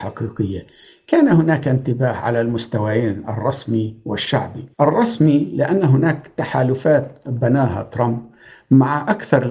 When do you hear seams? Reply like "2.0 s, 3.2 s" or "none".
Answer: 4.7 s